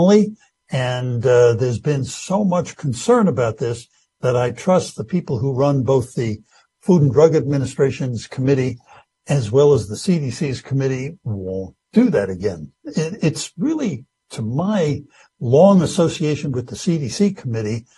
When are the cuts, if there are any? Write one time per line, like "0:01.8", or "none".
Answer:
none